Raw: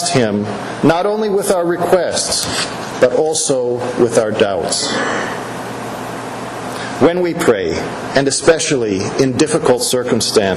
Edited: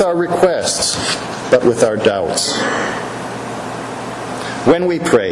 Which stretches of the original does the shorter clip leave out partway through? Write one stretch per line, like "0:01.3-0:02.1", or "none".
0:03.1-0:03.9